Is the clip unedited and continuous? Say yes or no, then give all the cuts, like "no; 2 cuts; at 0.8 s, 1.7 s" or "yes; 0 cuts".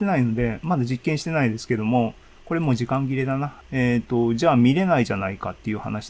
no; 1 cut; at 3.6 s